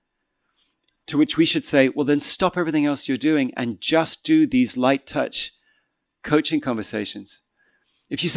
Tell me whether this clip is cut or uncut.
uncut